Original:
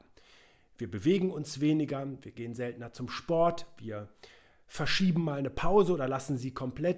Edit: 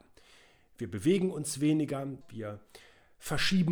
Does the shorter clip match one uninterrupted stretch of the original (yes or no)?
no